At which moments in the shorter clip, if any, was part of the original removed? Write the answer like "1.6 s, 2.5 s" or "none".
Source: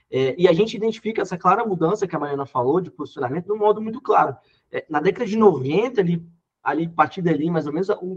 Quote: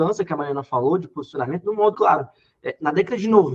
1.9 s